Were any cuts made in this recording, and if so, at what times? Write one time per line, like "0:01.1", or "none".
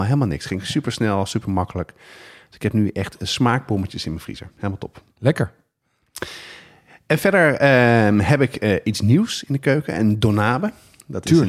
none